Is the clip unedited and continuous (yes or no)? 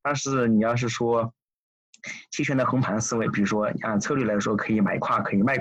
yes